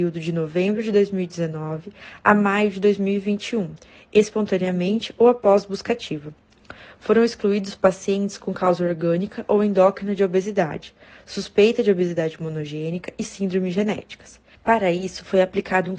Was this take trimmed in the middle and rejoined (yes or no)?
yes